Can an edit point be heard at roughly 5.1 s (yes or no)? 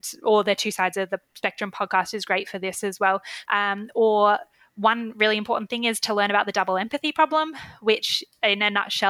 no